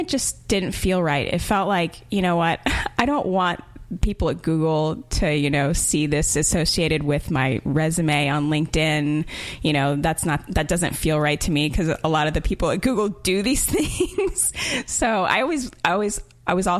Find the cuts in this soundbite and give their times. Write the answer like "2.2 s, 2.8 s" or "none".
none